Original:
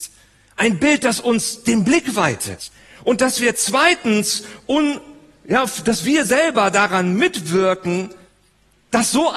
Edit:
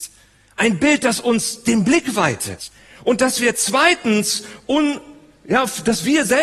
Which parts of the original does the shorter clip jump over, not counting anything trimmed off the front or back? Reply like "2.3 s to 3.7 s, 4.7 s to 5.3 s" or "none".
none

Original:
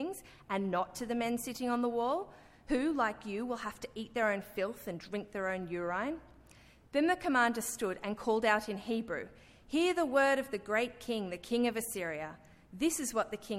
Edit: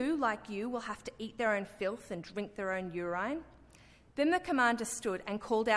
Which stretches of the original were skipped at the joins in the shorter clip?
none

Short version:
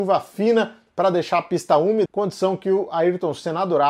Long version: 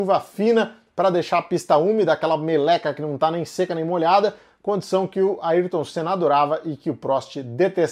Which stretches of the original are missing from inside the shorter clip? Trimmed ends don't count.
2.1 s to 4.6 s

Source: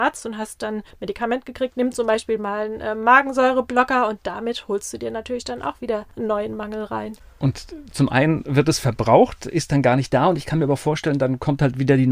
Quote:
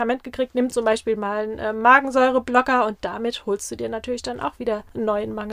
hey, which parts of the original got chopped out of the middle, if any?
none

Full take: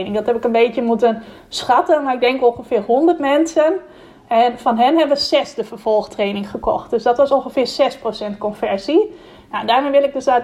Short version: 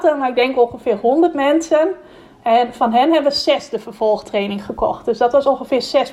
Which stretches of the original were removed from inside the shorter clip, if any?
none

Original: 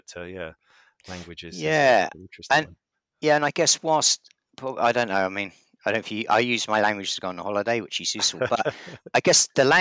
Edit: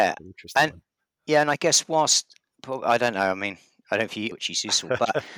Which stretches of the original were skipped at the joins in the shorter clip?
6.3 s to 7.8 s

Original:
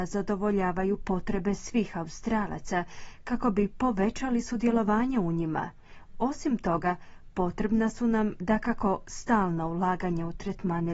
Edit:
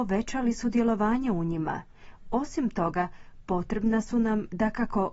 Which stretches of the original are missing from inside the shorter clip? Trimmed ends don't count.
none

